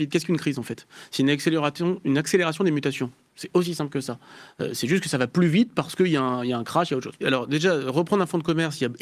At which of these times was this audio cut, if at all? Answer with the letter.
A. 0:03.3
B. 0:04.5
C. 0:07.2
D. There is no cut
C